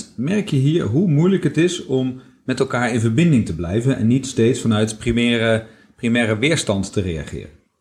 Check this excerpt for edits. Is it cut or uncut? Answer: uncut